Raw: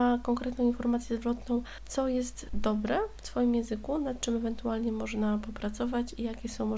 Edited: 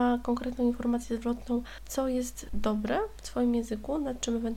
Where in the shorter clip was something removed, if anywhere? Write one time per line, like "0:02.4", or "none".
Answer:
none